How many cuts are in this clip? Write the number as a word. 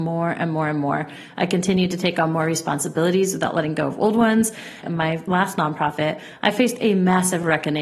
one